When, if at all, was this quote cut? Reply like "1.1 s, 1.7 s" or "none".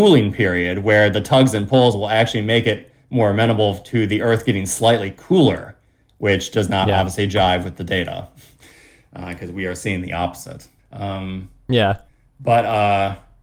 10.8 s